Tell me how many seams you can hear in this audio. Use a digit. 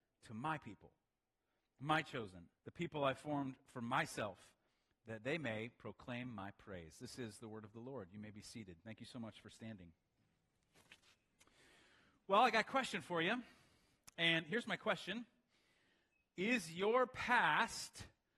1